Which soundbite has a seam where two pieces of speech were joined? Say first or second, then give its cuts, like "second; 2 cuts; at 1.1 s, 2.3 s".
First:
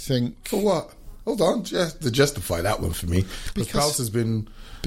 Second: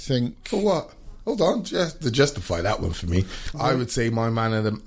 second; 1 cut; at 3.5 s